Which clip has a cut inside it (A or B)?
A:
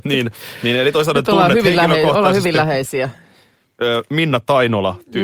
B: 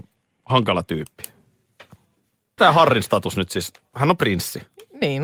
B